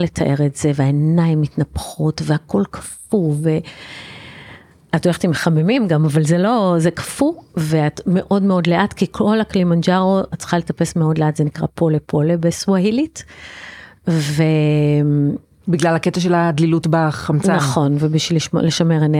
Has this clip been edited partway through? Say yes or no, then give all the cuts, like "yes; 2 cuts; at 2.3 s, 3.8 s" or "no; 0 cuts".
no; 0 cuts